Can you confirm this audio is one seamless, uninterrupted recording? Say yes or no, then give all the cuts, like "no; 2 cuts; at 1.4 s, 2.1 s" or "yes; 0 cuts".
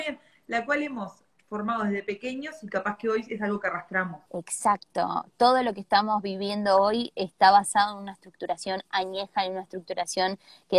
no; 1 cut; at 4.3 s